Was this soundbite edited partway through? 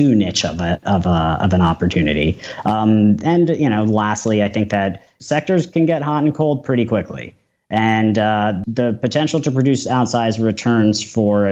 no; 0 cuts

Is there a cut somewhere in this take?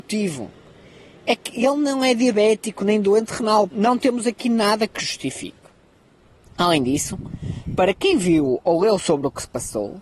yes; 1 cut; at 3.7 s

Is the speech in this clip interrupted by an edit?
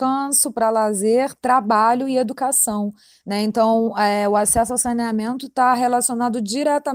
no; 0 cuts

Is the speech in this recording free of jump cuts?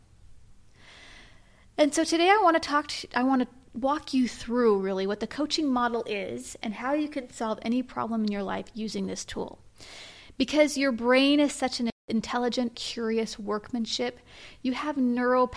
no; 1 cut; at 12.7 s

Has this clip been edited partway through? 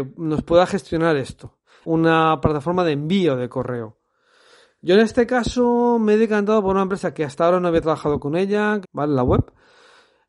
yes; 2 cuts; at 1.8 s, 8.8 s

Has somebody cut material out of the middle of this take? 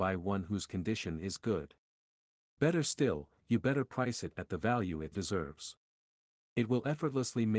yes; 2 cuts; at 3.4 s, 5.1 s

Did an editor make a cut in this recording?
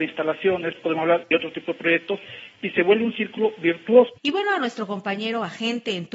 yes; 1 cut; at 4.2 s

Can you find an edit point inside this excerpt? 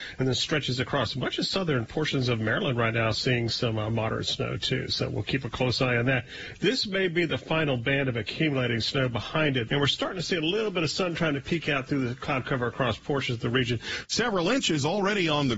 yes; 2 cuts; at 9.7 s, 14.0 s

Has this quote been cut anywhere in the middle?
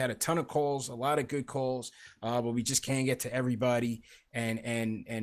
no; 0 cuts

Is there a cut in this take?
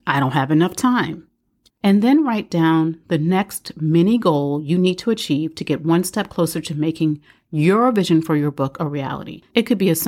yes; 1 cut; at 1.7 s

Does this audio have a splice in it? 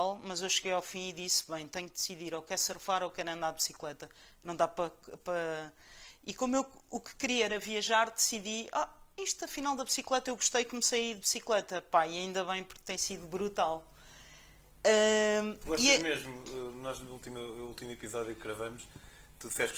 no; 0 cuts

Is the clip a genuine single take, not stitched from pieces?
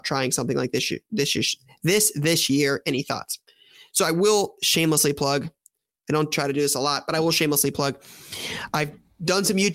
yes; 0 cuts

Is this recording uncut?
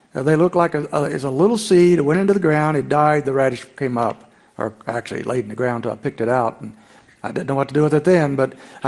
yes; 0 cuts

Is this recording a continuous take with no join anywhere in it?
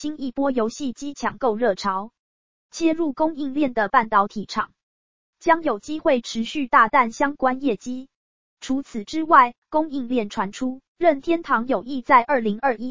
no; 2 cuts; at 8.4 s, 10.9 s

